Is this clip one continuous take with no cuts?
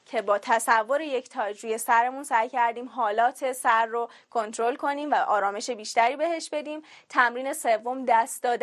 yes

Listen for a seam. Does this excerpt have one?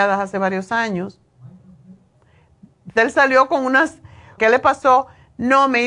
yes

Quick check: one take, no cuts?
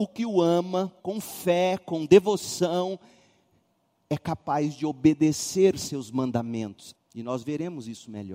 no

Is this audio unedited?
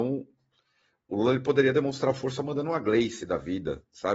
yes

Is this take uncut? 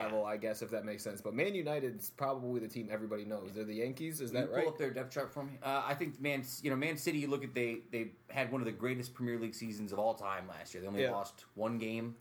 yes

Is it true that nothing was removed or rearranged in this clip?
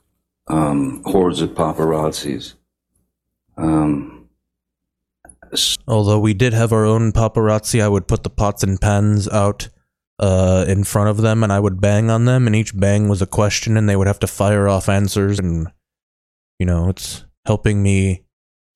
no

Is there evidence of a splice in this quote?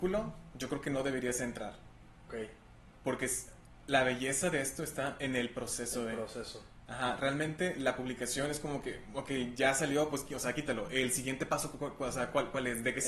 no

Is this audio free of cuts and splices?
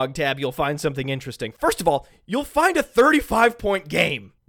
yes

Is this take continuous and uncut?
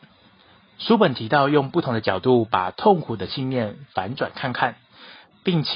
yes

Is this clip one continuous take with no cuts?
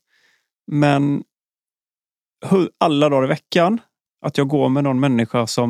no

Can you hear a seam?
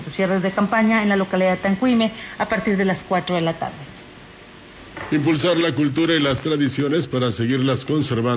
no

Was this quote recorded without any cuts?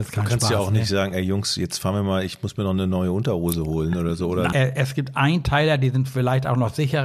no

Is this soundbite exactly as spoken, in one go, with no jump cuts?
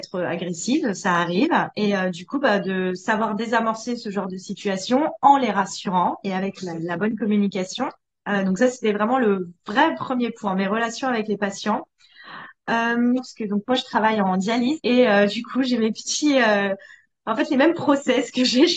no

